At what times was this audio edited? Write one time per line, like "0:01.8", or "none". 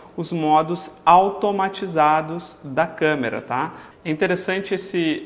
0:03.9